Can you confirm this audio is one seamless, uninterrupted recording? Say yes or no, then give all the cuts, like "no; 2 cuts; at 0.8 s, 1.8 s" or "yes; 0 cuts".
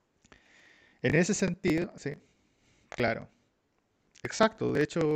yes; 0 cuts